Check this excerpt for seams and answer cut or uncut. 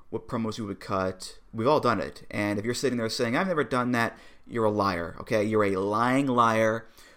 uncut